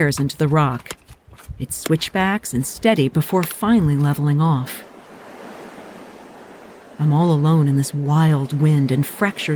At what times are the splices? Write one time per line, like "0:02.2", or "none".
none